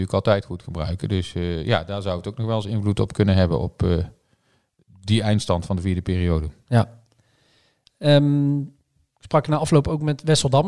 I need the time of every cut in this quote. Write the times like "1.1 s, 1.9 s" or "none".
none